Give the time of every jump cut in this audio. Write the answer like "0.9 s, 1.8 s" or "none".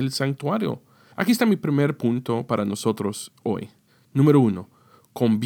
1.1 s

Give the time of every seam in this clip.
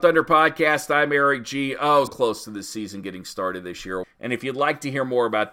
2.1 s, 4.0 s

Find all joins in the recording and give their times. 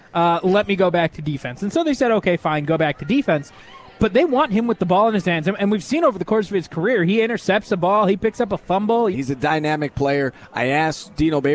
9.1 s

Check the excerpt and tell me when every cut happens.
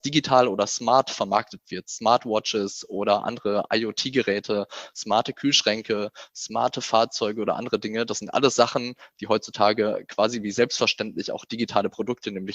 none

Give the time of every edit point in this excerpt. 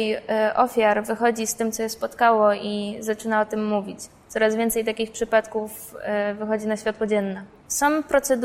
none

